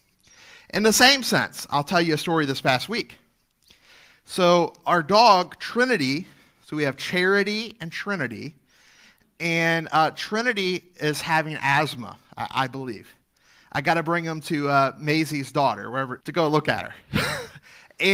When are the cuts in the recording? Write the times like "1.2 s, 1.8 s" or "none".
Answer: 16.2 s